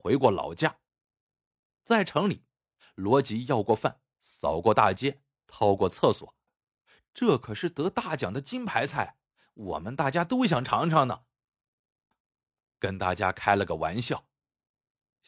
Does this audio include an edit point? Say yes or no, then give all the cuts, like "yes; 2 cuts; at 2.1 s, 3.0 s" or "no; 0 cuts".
yes; 2 cuts; at 6.5 s, 12.1 s